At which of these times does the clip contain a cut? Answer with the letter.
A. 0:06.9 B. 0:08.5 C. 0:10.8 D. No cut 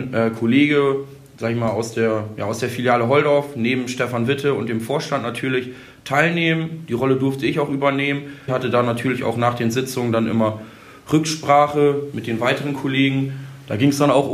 B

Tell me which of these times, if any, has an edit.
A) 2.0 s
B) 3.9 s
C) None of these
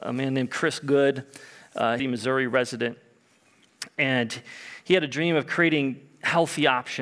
A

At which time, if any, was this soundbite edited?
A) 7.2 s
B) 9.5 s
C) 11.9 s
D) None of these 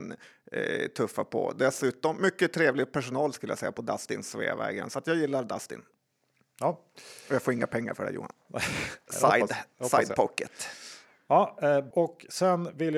C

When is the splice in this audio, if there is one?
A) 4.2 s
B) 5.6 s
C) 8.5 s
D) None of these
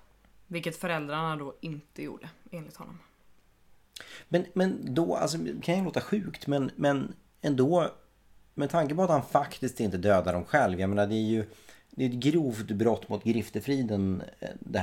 B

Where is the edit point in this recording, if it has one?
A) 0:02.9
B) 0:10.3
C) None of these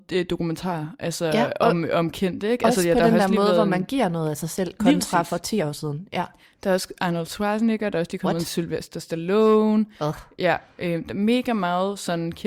C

